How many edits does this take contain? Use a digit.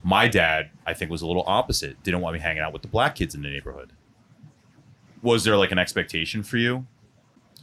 1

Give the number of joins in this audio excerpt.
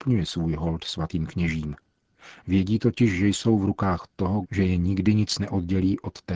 2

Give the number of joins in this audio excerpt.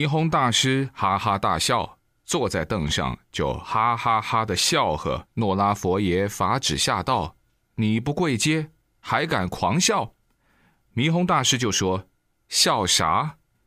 1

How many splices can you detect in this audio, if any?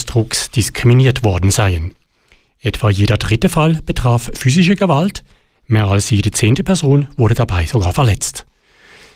0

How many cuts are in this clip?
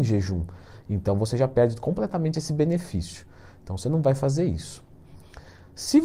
0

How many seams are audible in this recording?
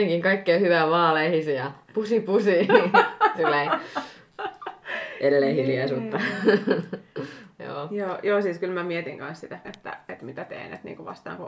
1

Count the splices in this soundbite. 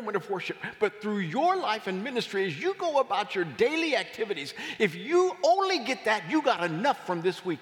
0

